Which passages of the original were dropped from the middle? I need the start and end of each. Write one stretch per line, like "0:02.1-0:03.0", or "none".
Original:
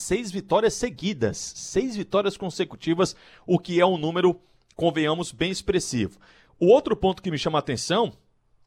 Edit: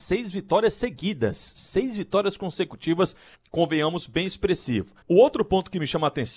0:03.3-0:04.6
0:06.3-0:06.5